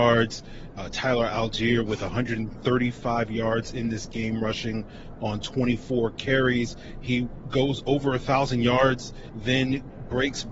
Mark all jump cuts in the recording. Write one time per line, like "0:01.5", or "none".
none